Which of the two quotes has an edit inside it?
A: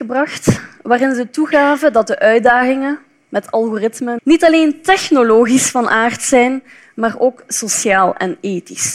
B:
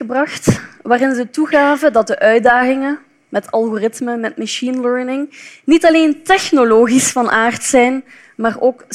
A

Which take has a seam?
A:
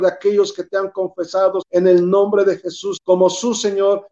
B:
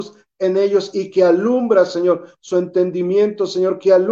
A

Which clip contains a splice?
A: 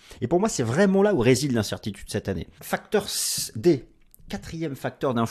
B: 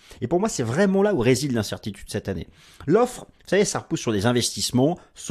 A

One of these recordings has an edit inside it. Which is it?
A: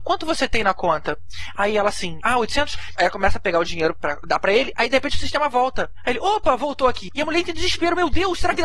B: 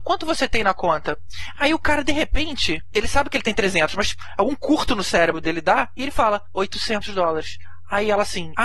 A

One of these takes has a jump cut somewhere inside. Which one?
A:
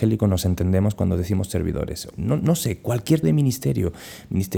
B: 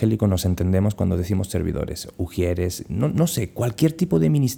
A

